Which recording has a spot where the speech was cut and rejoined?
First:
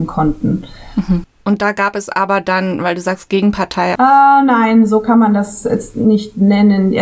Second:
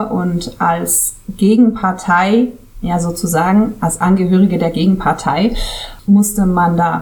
first; 2 cuts; at 1.2 s, 3.9 s

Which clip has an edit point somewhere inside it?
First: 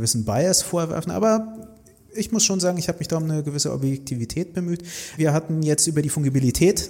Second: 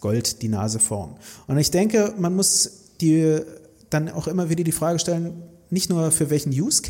first; 1 cut; at 5.2 s

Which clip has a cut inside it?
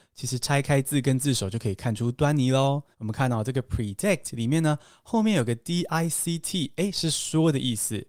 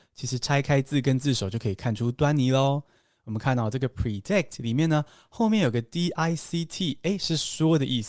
first; 1 cut; at 2.9 s

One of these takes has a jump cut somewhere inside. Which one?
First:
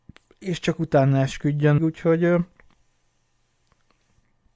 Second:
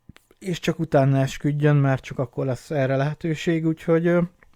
first; 1 cut; at 1.8 s

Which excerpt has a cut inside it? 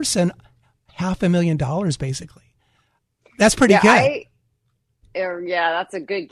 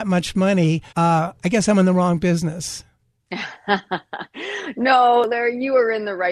second; 1 cut; at 0.9 s

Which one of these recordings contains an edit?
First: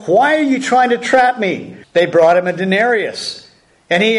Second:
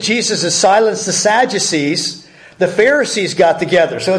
first; 1 cut; at 1.8 s

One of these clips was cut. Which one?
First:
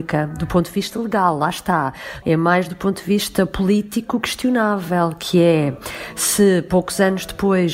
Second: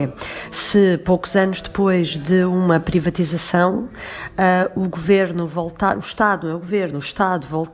first; 1 cut; at 2.2 s

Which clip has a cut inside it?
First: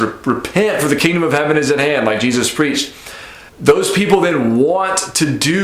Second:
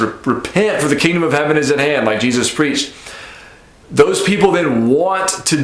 first; 1 cut; at 3.5 s

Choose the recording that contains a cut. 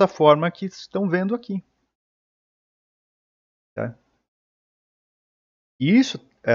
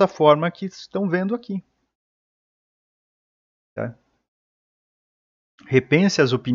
second; 1 cut; at 5.6 s

